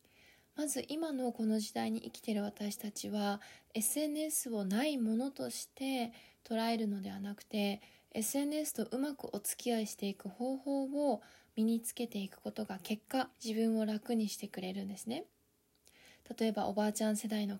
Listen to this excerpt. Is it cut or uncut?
cut